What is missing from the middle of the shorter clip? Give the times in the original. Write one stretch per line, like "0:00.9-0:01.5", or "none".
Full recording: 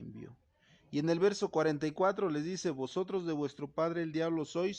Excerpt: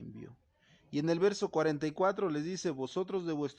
none

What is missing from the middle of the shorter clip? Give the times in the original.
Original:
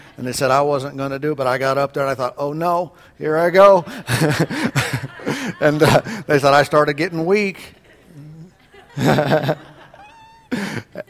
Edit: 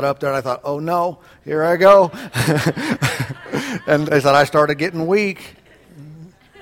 0:05.8-0:06.2

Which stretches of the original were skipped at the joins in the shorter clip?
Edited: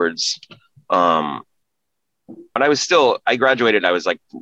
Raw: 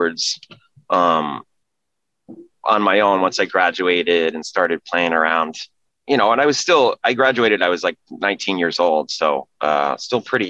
0:02.6-0:06.3

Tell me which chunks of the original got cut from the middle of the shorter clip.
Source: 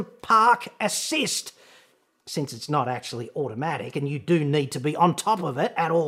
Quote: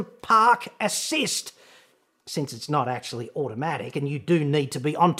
none

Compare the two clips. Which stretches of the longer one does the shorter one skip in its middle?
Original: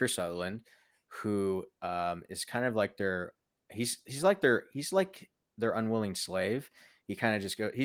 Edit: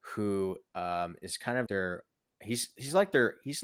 0:02.7-0:03.0

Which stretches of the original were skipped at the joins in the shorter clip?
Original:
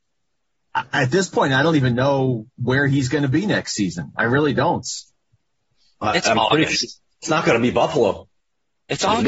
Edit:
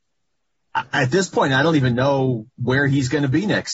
none

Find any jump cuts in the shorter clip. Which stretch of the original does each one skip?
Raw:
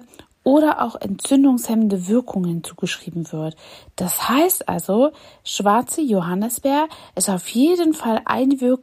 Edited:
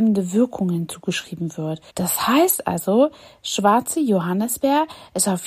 0:03.6-0:03.9

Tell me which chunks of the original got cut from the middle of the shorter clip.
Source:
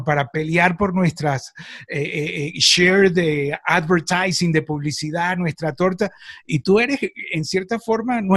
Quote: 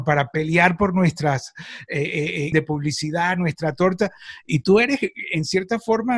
0:02.5-0:04.5

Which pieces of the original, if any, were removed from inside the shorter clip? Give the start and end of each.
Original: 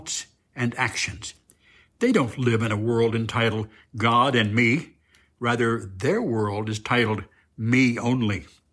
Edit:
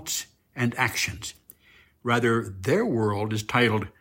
0:01.9-0:05.2

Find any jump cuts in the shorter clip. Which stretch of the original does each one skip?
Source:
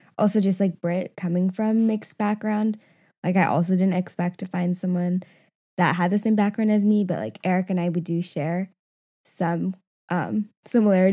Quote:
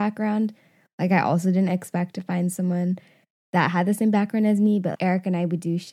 0:07.2-0:07.4

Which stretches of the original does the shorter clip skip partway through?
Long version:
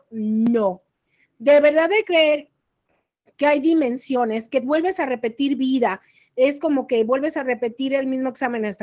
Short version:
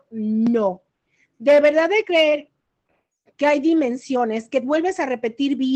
none

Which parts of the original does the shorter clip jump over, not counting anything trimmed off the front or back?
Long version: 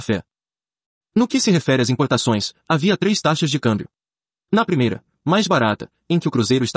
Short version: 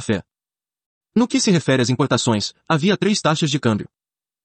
none

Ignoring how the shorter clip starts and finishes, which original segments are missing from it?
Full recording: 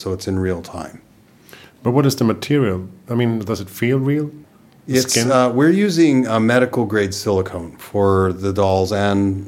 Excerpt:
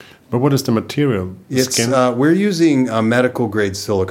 0:02.9-0:04.8

